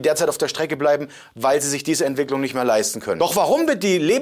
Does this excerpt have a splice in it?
no; 0 cuts

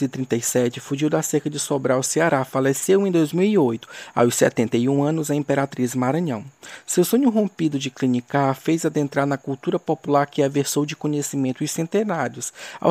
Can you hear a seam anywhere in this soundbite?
no; 0 cuts

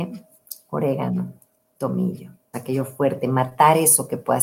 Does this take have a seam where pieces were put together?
yes; 1 cut; at 2.5 s

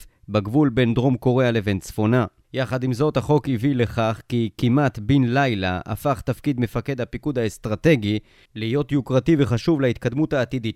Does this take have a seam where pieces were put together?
no; 0 cuts

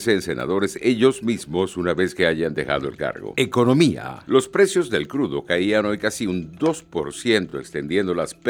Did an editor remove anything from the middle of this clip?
no; 0 cuts

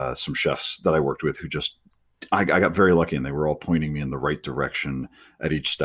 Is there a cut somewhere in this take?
no; 0 cuts

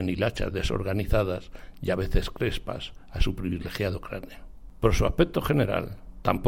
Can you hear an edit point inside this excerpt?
no; 0 cuts

